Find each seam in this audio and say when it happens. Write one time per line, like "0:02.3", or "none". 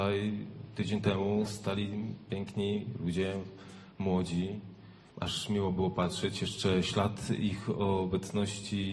0:05.1